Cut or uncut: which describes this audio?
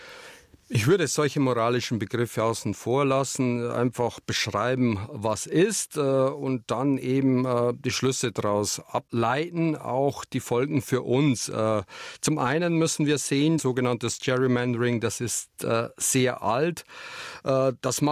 cut